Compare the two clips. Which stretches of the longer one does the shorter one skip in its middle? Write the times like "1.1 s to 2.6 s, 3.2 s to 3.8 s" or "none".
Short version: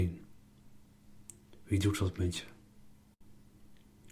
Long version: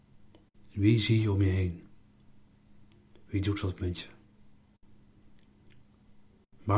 none

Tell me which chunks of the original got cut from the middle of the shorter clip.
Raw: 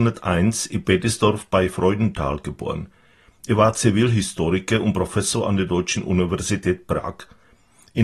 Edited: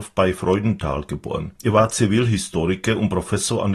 2.9 s to 3.4 s

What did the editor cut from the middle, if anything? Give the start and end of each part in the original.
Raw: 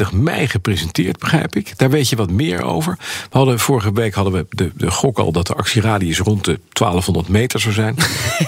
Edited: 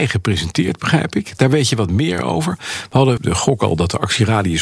3.6 s to 4.7 s

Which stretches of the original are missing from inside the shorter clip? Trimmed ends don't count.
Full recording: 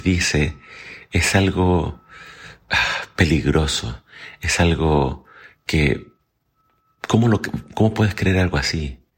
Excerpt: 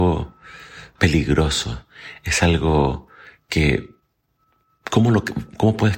2.6 s to 3.1 s

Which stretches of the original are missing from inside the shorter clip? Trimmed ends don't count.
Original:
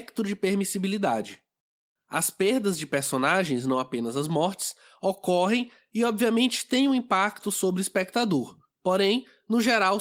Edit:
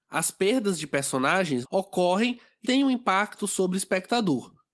3.6 s to 4.9 s, 5.9 s to 6.7 s

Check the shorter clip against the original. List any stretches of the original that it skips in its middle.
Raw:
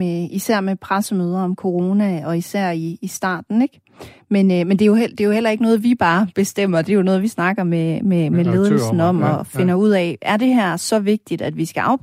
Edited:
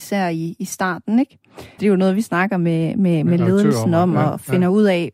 4.2 s to 6.8 s

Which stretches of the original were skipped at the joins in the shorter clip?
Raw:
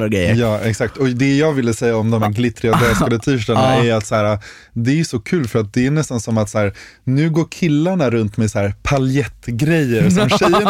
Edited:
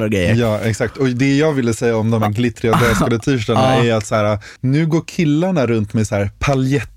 4.6 s to 7.0 s

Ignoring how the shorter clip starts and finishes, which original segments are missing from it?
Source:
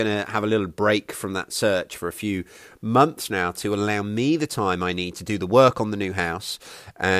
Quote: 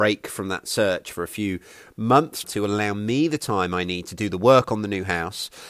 3.3 s to 3.5 s

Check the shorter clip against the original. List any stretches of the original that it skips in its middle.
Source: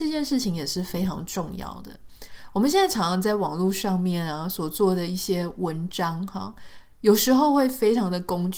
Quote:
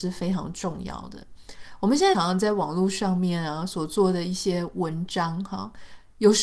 2.9 s to 3.0 s

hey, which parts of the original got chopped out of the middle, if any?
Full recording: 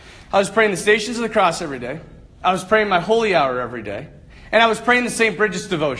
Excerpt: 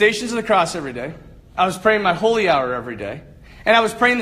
none

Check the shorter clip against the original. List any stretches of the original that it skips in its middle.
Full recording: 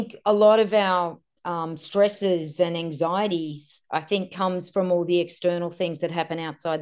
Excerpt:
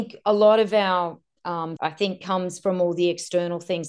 1.8 s to 3.9 s

